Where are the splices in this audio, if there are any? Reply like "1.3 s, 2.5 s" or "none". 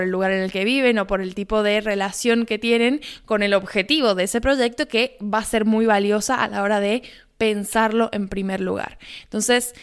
none